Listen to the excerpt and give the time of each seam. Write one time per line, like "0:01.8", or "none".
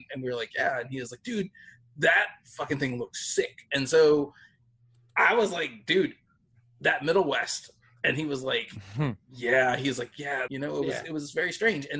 0:10.5